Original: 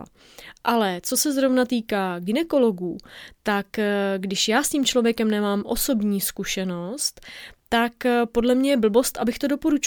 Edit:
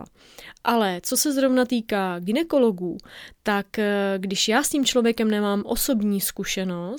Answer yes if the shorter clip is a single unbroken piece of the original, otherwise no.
yes